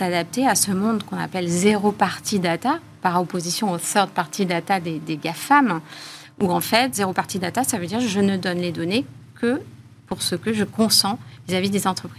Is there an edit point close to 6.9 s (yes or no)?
no